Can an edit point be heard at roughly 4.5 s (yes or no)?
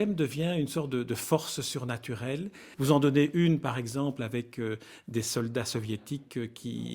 no